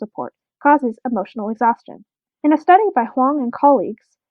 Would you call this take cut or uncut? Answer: cut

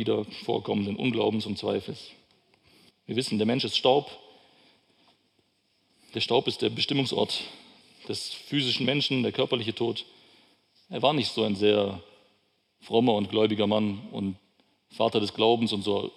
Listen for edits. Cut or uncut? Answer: cut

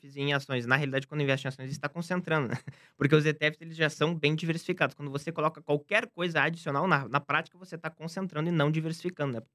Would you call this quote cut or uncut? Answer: uncut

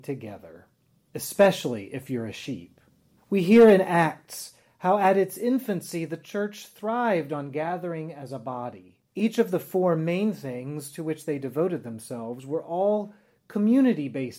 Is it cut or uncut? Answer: cut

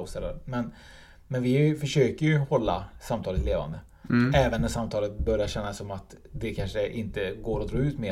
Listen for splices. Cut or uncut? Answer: uncut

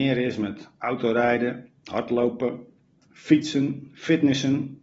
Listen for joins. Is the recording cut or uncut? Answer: uncut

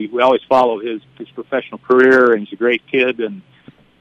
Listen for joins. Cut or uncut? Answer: cut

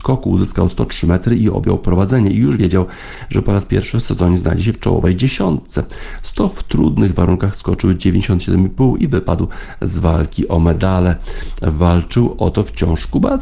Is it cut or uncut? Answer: uncut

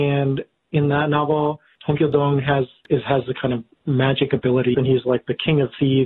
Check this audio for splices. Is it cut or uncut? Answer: cut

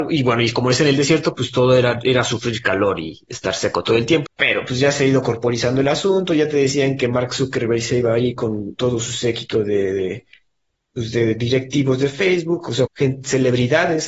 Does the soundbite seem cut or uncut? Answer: cut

